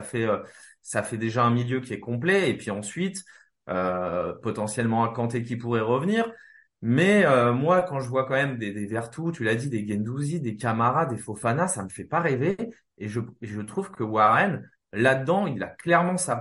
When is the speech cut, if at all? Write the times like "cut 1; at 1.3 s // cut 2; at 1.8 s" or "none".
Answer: none

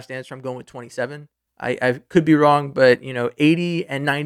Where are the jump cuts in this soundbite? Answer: cut 1; at 1.5 s

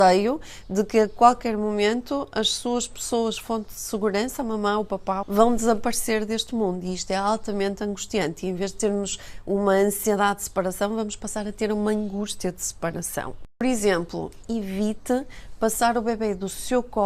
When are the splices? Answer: cut 1; at 5.2 s // cut 2; at 14.4 s

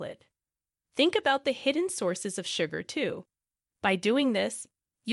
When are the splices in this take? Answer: none

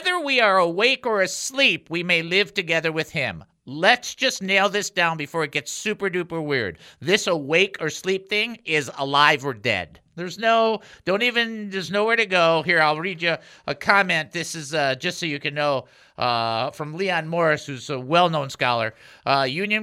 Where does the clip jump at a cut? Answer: none

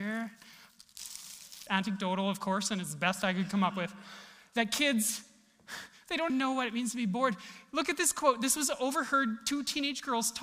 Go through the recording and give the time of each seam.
cut 1; at 1.7 s // cut 2; at 6.3 s

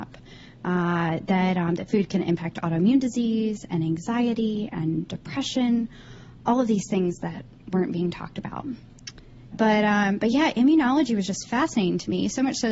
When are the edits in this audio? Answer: cut 1; at 9.5 s

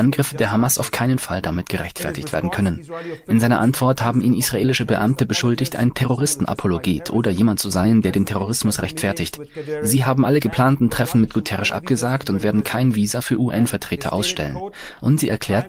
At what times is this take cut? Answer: none

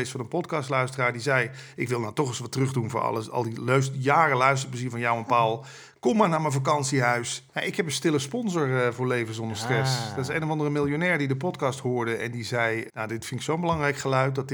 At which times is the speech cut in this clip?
cut 1; at 7.5 s // cut 2; at 12.9 s

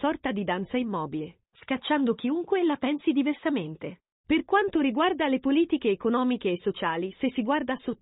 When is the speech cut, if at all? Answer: cut 1; at 1.5 s // cut 2; at 4.2 s

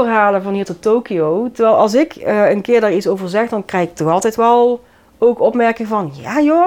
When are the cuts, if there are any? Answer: none

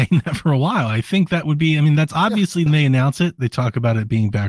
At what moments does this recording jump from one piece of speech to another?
cut 1; at 2.7 s

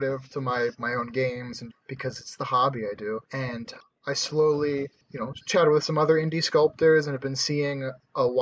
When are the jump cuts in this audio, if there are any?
cut 1; at 1.7 s // cut 2; at 3.2 s

